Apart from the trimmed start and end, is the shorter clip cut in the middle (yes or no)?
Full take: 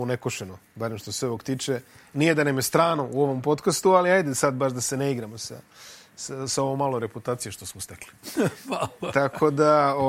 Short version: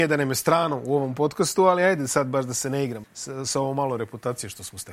yes